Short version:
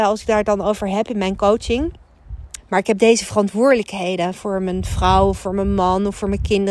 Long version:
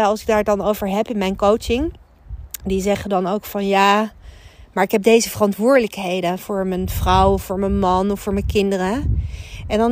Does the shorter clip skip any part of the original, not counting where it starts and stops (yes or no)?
yes